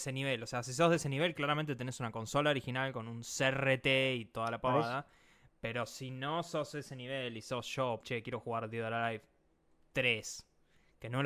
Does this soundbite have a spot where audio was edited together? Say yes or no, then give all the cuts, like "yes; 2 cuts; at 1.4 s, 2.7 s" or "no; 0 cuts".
yes; 1 cut; at 8.0 s